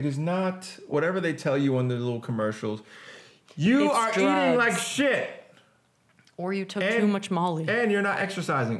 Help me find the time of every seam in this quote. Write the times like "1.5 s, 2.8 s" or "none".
none